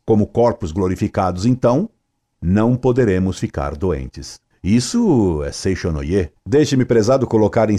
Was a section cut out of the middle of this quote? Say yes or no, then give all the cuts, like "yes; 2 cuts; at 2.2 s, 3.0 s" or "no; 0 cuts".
yes; 2 cuts; at 4.5 s, 6.3 s